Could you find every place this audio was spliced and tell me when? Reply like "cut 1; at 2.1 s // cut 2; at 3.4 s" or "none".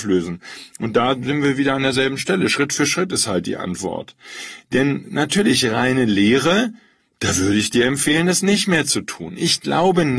none